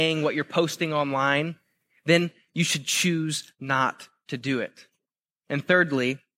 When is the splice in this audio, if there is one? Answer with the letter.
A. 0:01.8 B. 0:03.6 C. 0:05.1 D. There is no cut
D